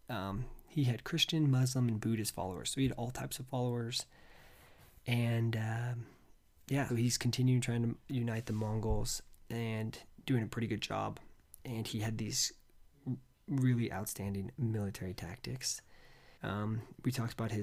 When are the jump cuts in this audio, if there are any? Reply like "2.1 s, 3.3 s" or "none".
6.9 s, 16.4 s